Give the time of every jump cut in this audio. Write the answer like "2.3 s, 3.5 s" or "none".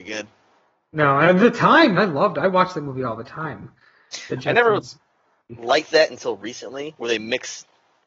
1.9 s